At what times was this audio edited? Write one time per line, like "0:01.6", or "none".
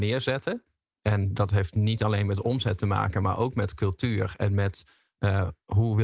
none